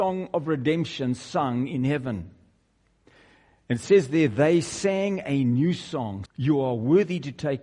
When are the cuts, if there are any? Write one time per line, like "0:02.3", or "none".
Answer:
0:06.3

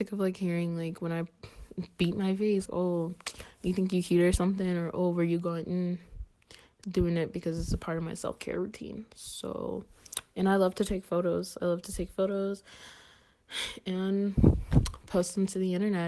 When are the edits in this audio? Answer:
0:02.7

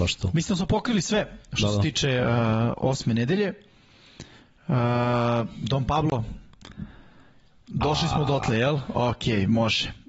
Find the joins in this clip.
none

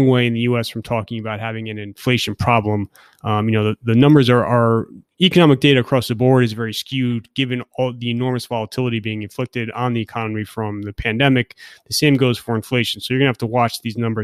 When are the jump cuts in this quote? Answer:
none

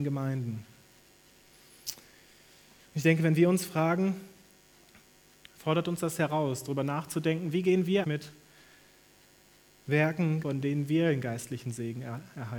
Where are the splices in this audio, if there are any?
0:08.0
0:10.4

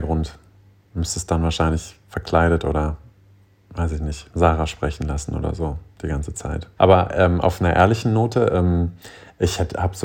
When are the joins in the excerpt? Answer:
0:04.3
0:06.8

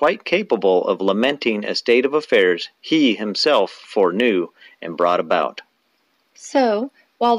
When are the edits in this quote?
none

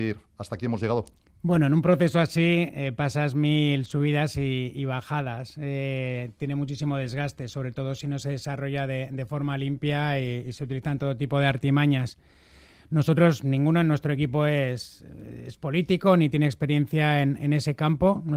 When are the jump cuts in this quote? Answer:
none

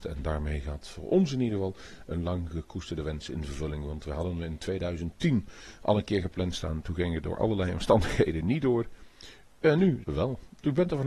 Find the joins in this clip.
0:10.0

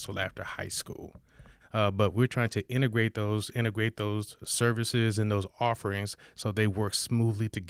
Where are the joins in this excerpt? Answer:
0:01.6

